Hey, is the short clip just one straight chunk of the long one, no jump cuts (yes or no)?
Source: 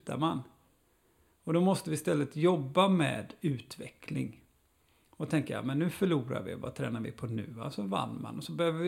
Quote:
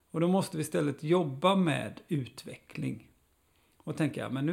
yes